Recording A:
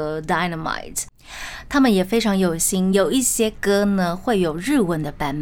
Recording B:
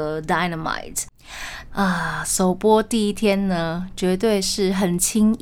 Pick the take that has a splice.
B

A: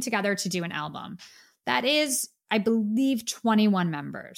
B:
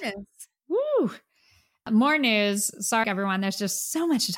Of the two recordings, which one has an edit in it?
B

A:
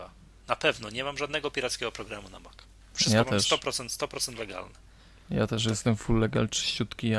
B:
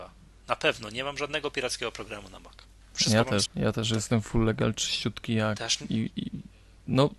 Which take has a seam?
B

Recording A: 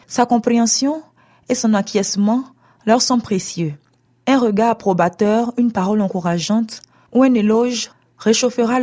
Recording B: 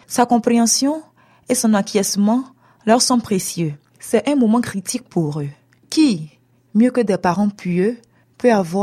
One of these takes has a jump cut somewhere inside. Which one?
B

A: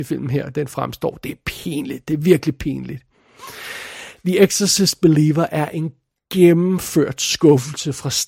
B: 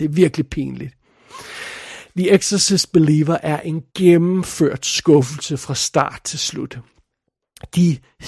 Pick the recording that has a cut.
B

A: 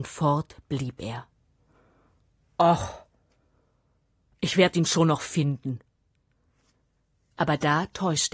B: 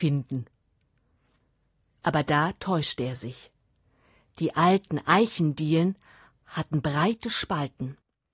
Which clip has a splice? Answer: A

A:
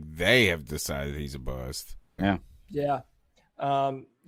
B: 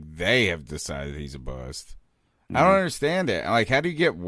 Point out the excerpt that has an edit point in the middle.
A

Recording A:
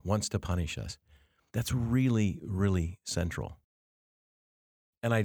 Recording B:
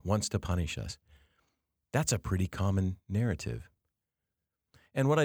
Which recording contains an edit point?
A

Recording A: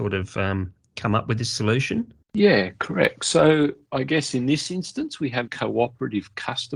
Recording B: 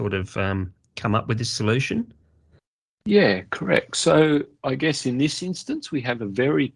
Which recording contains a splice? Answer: A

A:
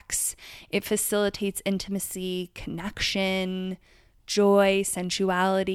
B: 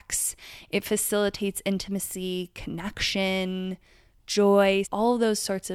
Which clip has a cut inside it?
B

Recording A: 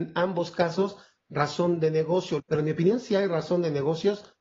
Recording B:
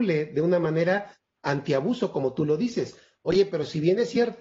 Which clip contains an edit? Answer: A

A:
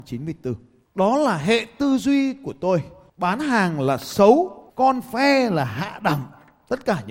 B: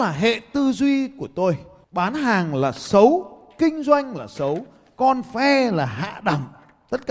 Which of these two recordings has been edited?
A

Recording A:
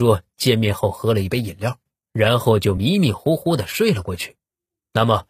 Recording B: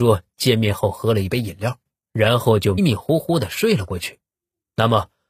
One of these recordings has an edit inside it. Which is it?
B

